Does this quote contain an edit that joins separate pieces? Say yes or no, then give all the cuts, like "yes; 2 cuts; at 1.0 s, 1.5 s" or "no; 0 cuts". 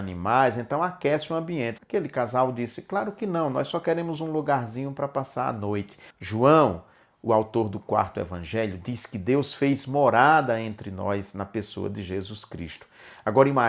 yes; 2 cuts; at 1.8 s, 6.1 s